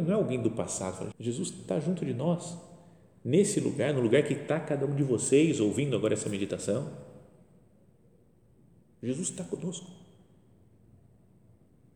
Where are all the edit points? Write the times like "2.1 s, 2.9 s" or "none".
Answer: 1.1 s